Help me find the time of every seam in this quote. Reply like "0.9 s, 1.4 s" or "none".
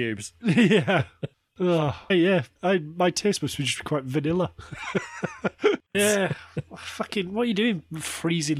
2.1 s, 5.9 s